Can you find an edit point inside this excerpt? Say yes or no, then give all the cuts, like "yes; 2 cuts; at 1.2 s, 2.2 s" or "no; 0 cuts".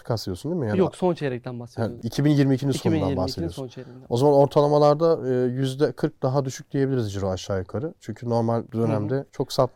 no; 0 cuts